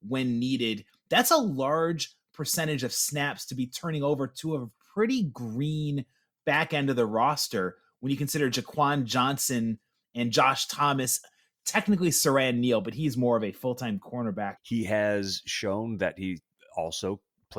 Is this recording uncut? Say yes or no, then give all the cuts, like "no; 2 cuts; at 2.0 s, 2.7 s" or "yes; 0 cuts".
no; 1 cut; at 14.6 s